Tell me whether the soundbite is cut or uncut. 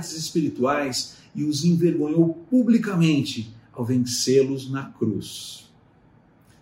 uncut